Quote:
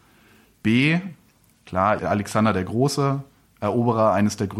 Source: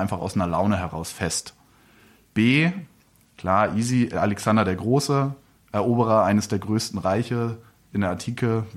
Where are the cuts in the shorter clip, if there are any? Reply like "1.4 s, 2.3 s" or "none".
2.0 s